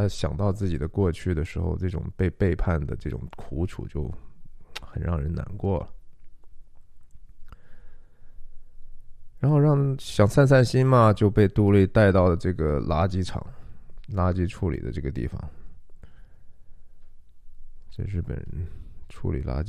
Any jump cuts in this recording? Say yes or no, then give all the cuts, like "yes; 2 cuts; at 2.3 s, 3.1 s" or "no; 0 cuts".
no; 0 cuts